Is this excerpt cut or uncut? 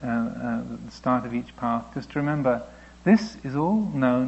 uncut